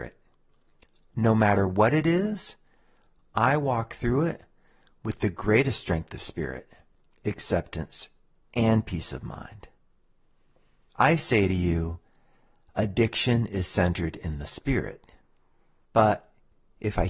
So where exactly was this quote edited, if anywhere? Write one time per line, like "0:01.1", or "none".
0:15.8

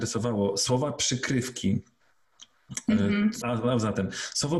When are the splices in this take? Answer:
0:03.4

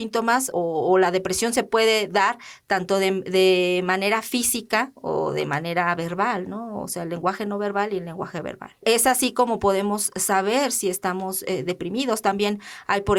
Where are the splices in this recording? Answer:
none

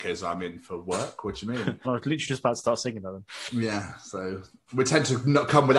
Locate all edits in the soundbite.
0:01.8

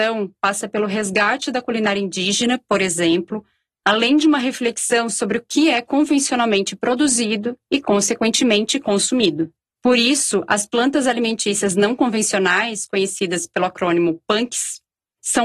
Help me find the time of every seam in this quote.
none

